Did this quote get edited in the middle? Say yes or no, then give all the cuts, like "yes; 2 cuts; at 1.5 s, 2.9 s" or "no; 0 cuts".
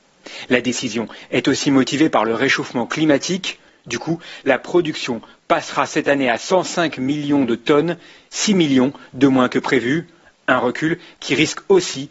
yes; 1 cut; at 3.7 s